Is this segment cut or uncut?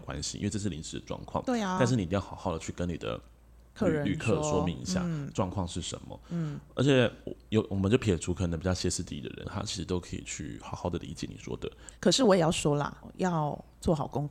cut